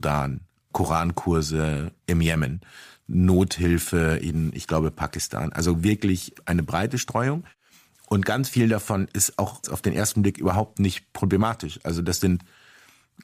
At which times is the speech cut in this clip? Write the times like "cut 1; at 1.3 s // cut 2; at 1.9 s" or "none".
none